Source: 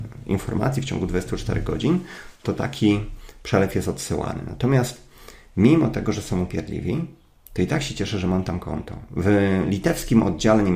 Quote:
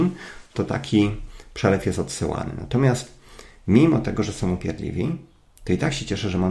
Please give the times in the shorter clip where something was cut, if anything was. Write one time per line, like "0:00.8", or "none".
none